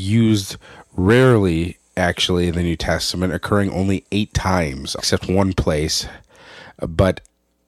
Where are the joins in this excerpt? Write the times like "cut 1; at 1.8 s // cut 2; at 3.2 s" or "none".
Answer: cut 1; at 5.0 s

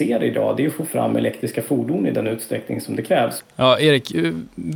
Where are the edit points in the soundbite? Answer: cut 1; at 3.4 s

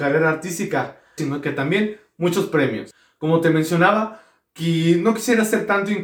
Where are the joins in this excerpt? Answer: cut 1; at 1.2 s

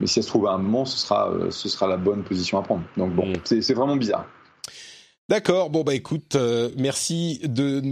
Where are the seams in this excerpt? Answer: none

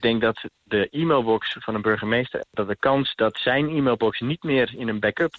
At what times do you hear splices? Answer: none

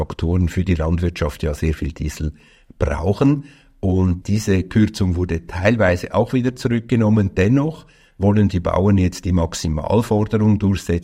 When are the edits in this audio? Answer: none

